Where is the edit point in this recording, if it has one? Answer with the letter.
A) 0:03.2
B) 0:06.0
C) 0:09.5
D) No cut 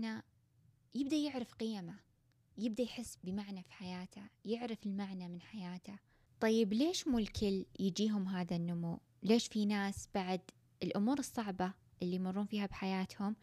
A